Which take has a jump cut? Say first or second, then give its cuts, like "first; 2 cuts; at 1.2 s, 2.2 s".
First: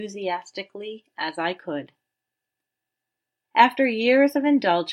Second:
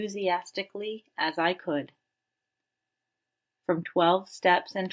first; 1 cut; at 3.4 s